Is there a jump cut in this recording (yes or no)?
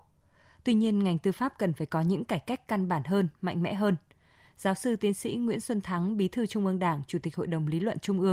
no